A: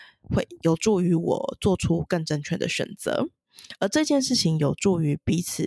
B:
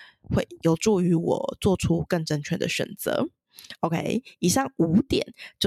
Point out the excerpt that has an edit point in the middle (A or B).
A